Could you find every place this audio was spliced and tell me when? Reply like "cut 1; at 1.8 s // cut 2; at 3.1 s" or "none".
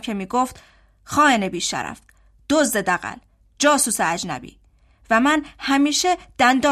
none